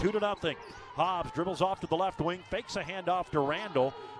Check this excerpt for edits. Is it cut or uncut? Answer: uncut